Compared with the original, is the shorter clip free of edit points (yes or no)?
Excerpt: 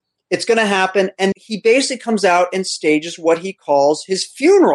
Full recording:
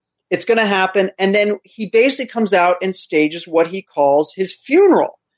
no